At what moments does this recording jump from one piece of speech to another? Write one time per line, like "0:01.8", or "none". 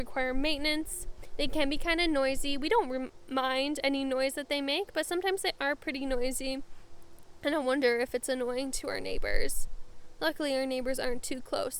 none